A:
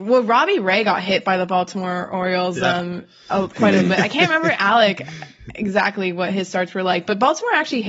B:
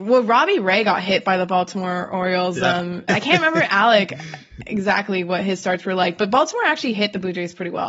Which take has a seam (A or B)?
B